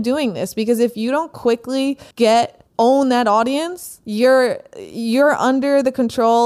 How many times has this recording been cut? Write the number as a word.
one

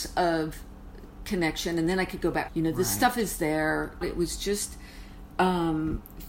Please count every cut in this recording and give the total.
two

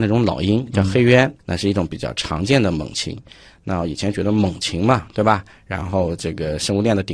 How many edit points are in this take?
one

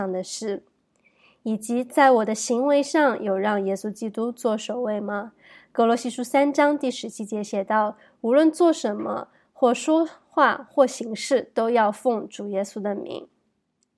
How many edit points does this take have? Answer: zero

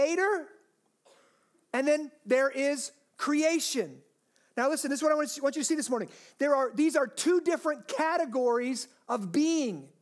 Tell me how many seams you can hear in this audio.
zero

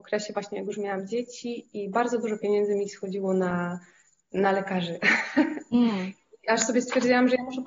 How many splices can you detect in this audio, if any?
zero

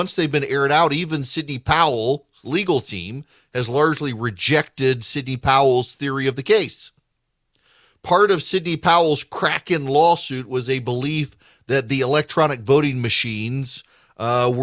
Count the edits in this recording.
zero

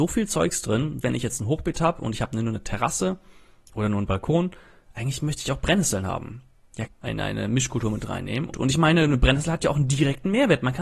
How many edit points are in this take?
three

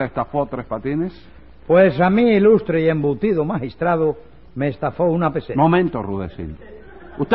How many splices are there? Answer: zero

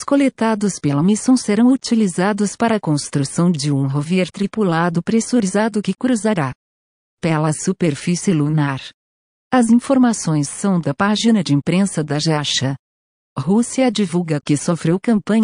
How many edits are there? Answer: zero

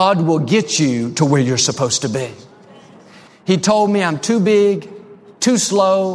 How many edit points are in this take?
one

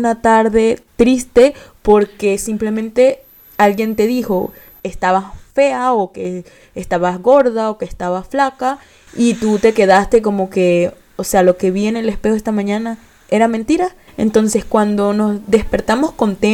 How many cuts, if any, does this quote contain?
one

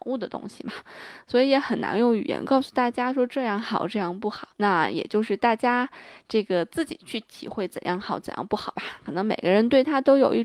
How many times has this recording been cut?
one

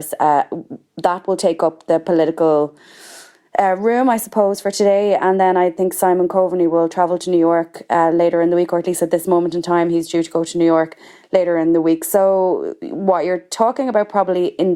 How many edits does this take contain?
zero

